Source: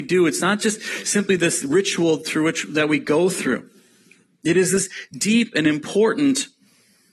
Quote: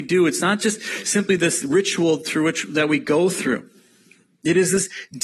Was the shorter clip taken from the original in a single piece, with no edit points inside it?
yes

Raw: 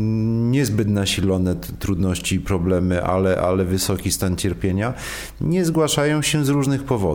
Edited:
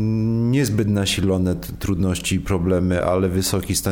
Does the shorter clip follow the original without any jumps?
no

